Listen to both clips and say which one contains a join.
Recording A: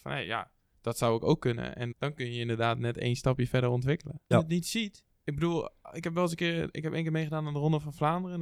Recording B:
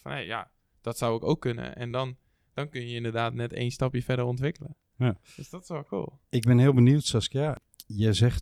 A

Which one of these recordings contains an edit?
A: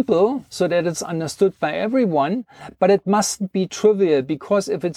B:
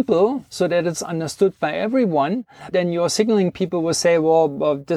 B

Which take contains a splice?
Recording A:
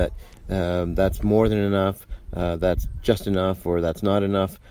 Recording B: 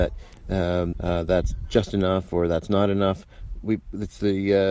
B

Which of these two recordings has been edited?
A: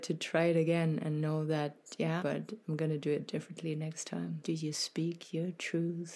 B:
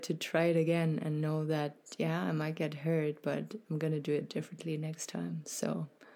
A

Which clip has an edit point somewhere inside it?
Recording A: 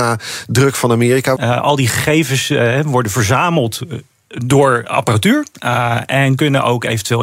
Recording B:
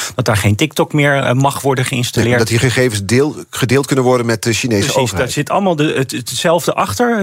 A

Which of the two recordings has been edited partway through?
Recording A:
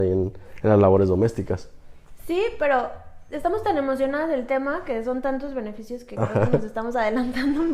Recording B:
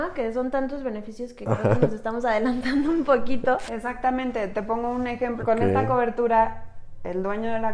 B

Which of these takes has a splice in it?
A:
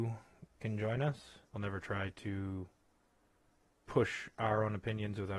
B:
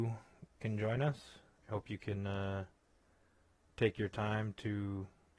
A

